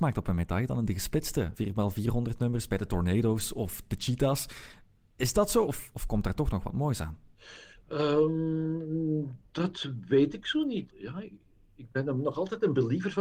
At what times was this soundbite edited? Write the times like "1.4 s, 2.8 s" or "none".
5.6 s, 10.9 s